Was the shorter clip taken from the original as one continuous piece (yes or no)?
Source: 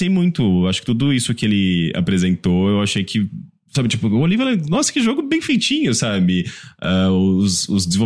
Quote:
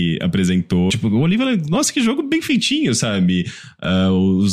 no